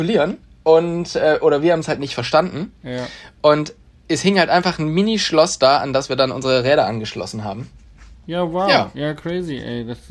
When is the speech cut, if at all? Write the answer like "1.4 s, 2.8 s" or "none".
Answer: 8.1 s

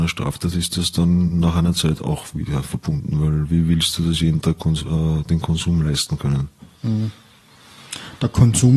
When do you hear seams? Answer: none

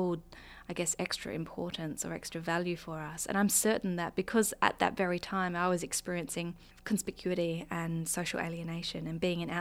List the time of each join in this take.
none

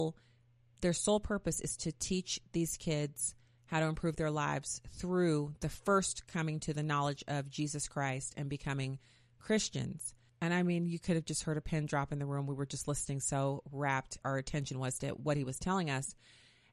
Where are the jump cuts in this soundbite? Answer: 10.3 s, 14.2 s

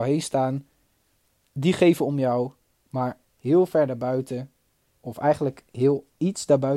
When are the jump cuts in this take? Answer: none

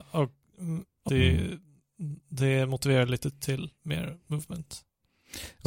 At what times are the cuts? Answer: 1.1 s

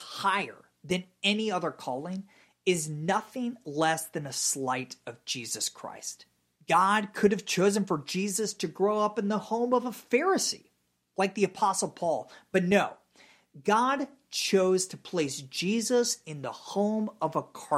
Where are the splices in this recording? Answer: 6.5 s

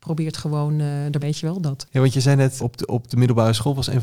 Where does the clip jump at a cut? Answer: 1.2 s, 2.6 s

